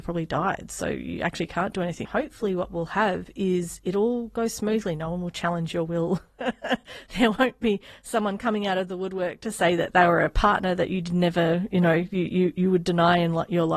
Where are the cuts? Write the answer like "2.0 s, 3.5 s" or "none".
2.1 s